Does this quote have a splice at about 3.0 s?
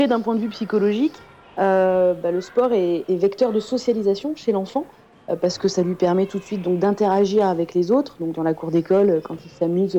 yes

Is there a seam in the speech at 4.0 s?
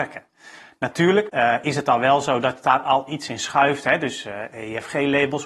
no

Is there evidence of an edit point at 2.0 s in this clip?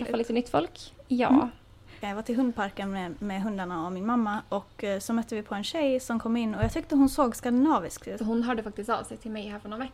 yes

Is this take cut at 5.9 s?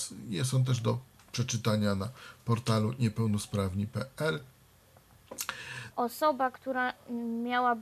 yes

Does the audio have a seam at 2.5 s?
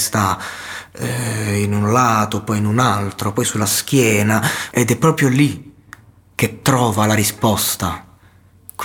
no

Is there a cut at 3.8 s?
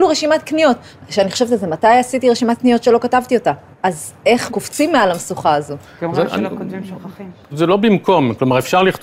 no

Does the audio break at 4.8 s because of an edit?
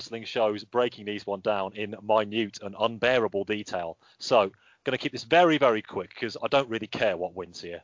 no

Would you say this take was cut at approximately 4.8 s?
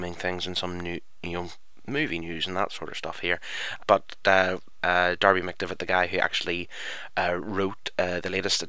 yes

